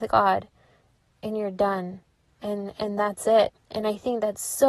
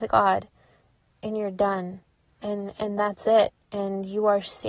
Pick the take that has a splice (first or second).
first